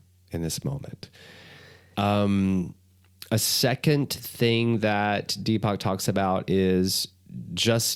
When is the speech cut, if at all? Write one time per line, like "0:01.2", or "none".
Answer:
0:01.9

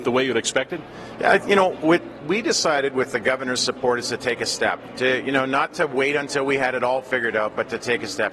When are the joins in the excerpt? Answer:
none

